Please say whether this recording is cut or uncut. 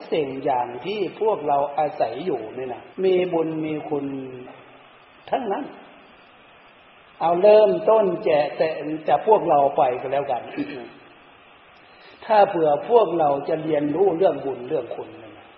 cut